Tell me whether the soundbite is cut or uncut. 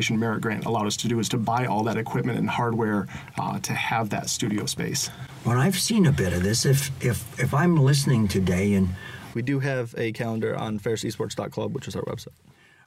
cut